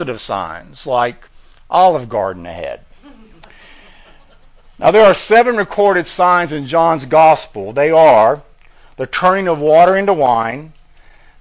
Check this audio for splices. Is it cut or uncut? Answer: uncut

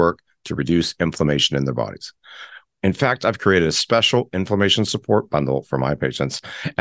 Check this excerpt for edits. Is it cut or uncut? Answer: cut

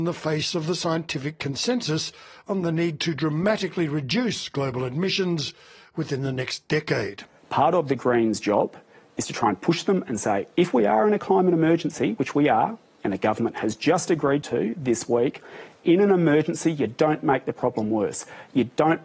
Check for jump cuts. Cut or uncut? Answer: uncut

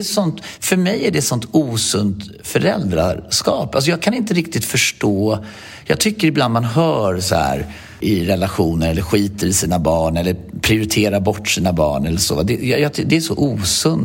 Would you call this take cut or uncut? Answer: cut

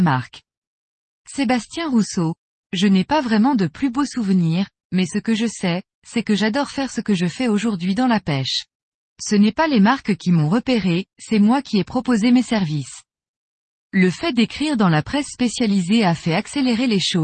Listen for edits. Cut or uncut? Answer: cut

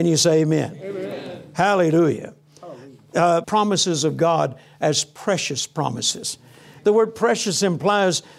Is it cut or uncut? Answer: cut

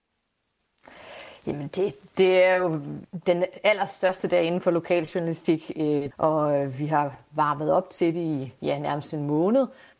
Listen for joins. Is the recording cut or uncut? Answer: cut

